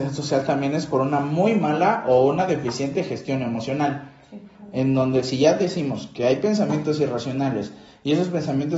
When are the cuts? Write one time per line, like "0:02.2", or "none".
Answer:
none